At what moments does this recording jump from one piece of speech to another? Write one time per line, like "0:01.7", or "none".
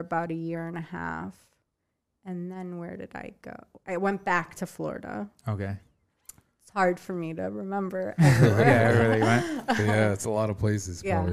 none